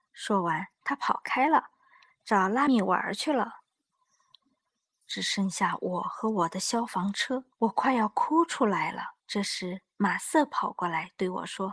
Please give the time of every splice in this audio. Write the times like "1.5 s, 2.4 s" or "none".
2.7 s, 7.5 s, 9.2 s